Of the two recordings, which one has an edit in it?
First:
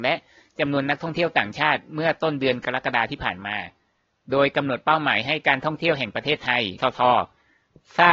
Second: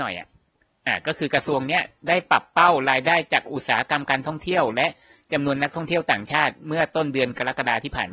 first; 1 cut; at 6.8 s

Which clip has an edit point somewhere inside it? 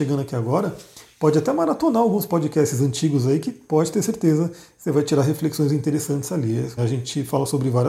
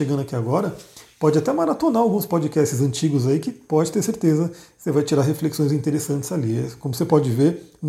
first; 1 cut; at 6.8 s

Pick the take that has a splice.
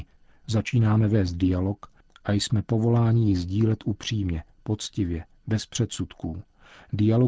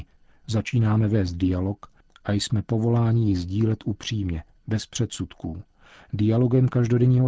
second; 1 cut; at 4.6 s

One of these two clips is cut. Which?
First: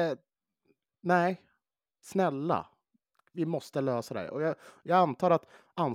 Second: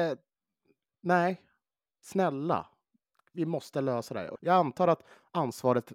second; 1 cut; at 4.4 s

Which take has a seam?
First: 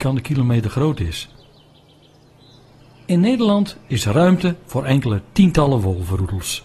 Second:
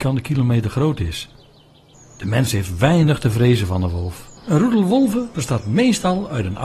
second; 2 cuts; at 1.9 s, 4.4 s

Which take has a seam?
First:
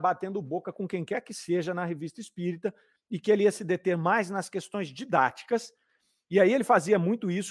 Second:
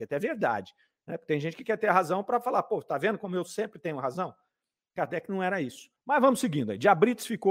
second; 1 cut; at 6.0 s

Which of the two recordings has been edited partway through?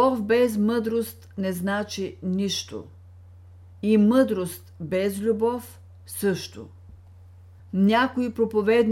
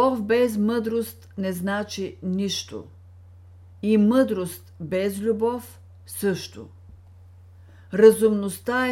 first; 1 cut; at 7.6 s

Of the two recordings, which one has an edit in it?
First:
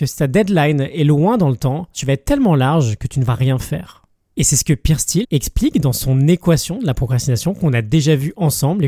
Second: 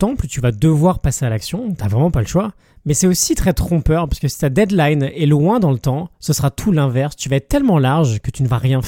first; 2 cuts; at 1.9 s, 5.2 s

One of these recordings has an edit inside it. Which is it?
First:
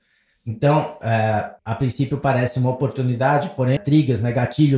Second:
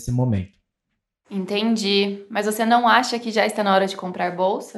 first; 2 cuts; at 1.6 s, 3.8 s

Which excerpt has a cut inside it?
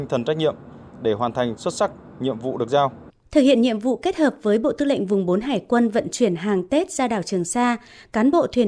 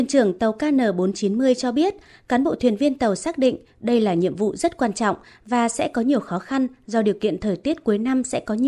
first; 1 cut; at 3.2 s

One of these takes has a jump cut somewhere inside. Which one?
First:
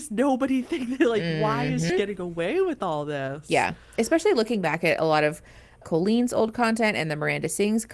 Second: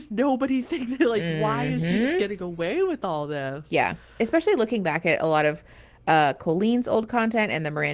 first; 2 cuts; at 1.9 s, 5.8 s

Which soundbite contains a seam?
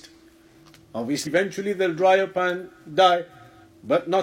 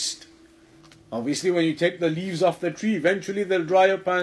first; 1 cut; at 1.3 s

